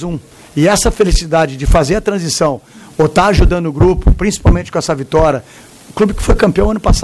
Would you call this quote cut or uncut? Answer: uncut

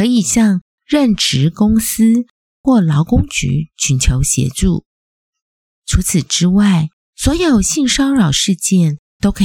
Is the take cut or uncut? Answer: uncut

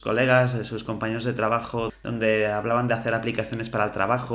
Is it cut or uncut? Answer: cut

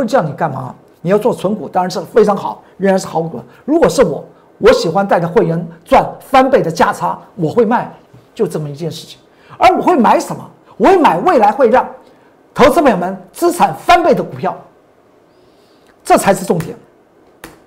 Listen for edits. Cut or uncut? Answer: uncut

